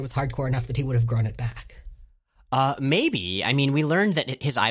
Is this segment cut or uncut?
uncut